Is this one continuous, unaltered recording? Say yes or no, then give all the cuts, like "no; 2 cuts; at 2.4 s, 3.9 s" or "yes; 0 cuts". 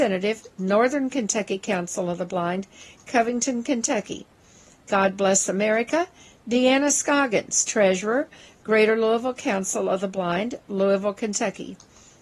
yes; 0 cuts